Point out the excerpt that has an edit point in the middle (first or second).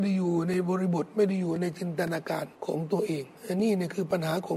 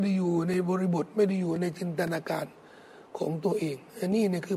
first